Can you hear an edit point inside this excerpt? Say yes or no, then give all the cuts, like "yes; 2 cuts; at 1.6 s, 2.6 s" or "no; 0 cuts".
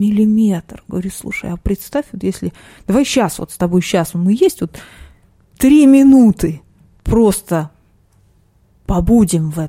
no; 0 cuts